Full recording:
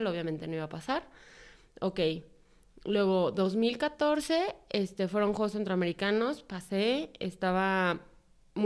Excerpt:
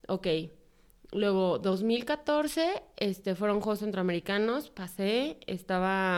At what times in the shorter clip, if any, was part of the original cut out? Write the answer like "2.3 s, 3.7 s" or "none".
none